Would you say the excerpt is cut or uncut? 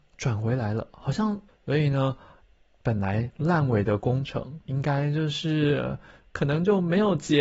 cut